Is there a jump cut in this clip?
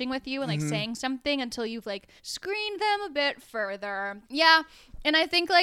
yes; 2 cuts; at 2.2 s, 4.2 s

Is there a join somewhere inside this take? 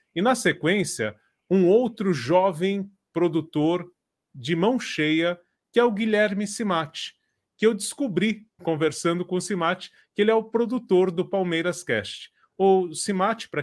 yes; 1 cut; at 8.6 s

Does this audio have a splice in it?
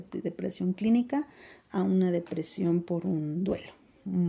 no; 0 cuts

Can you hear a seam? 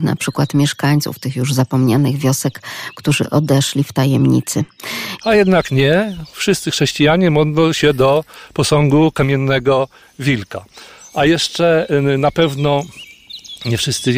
yes; 1 cut; at 5.2 s

